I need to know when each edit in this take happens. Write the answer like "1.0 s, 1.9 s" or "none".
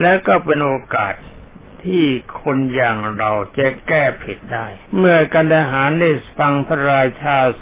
4.9 s